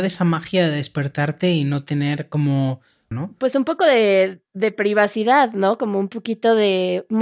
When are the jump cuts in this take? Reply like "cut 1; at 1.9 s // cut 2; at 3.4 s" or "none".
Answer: cut 1; at 3.1 s